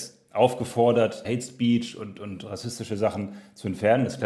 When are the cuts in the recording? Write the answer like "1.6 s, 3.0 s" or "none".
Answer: 1.2 s